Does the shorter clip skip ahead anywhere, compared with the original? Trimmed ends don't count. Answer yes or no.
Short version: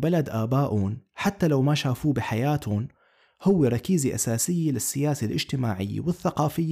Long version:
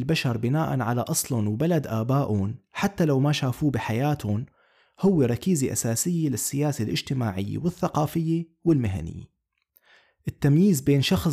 no